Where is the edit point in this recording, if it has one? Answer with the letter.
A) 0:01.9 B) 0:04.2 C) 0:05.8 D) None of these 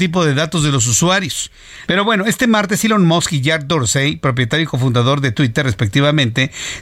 A